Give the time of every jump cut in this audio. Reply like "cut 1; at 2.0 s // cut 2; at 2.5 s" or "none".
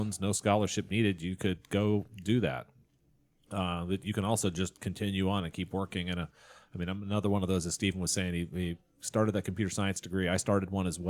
none